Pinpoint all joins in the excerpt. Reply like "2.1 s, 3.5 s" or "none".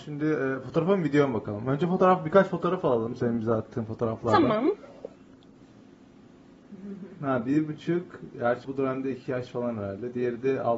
8.6 s